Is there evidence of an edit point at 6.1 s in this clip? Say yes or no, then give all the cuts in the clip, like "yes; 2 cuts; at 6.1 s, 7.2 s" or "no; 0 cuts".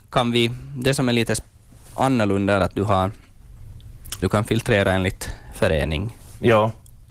no; 2 cuts; at 2.6 s, 4.2 s